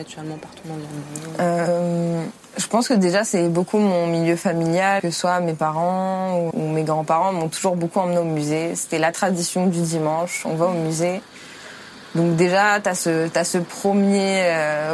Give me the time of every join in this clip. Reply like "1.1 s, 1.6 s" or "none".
5.0 s, 6.5 s

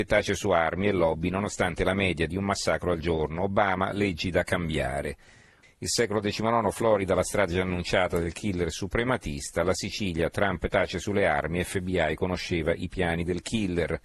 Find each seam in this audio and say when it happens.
5.6 s

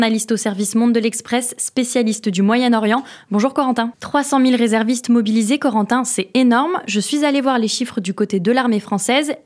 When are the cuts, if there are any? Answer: 3.9 s

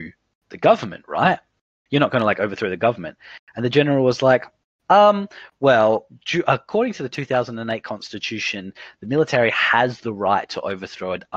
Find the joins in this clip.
none

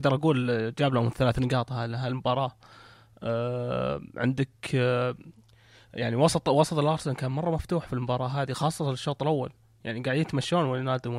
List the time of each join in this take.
none

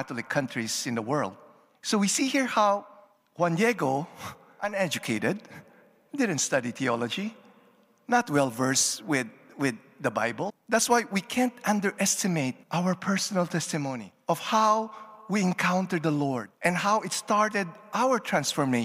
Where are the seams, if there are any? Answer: 10.5 s, 12.6 s

